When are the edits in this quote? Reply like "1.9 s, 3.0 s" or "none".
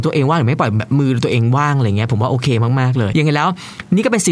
3.1 s